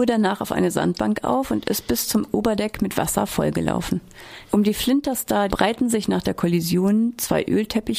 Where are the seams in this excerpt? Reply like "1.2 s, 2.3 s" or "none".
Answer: 4.4 s, 5.5 s